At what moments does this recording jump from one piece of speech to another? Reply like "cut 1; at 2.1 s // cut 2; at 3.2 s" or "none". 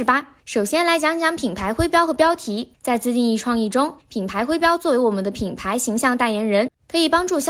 none

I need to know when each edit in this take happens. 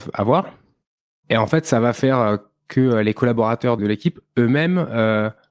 cut 1; at 1.2 s // cut 2; at 3.8 s

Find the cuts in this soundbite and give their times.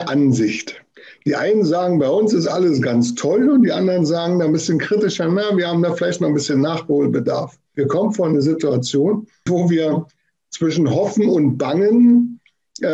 cut 1; at 7.7 s // cut 2; at 9.5 s

